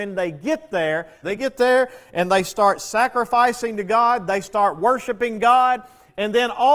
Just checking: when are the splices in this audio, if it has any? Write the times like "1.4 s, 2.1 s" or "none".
1.2 s

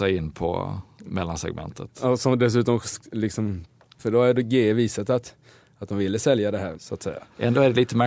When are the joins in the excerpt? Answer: 4.0 s, 6.7 s

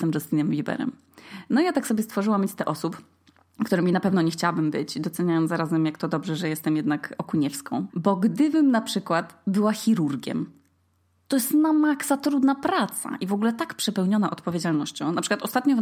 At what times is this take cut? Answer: 7.9 s

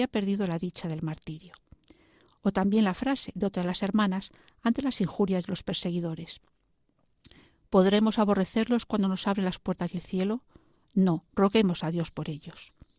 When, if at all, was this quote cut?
none

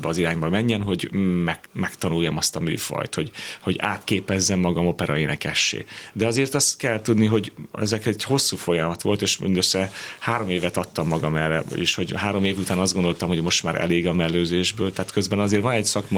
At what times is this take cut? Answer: 1.6 s

